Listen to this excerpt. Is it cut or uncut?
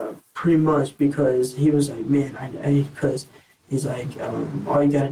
uncut